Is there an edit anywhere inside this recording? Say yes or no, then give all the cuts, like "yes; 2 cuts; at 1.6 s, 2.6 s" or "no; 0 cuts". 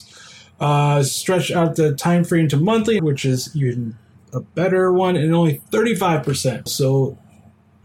yes; 2 cuts; at 3.0 s, 6.7 s